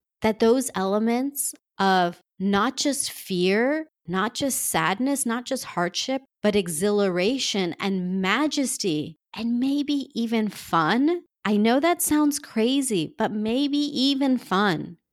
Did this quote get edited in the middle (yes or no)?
no